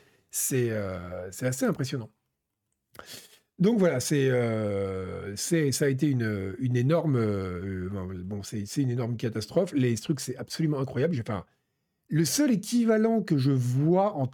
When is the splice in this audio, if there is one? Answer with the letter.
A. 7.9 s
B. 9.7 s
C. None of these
C